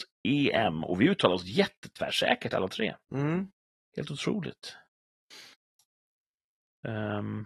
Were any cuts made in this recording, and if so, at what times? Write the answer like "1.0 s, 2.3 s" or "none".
none